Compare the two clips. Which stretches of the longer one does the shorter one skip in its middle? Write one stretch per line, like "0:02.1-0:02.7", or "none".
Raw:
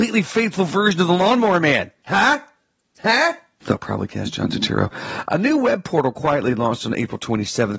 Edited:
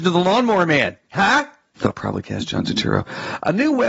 0:02.6-0:03.6